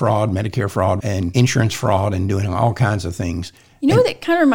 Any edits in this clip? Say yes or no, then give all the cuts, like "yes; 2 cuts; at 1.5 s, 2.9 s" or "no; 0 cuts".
yes; 1 cut; at 1.0 s